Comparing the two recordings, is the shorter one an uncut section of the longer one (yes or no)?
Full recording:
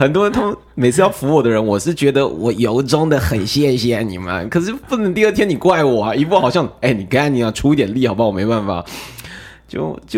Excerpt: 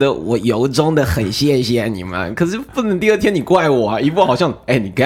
yes